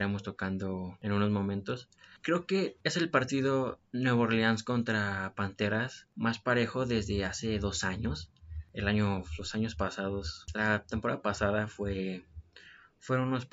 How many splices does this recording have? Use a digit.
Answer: 0